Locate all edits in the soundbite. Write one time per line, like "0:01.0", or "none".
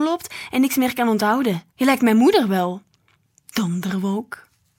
0:01.7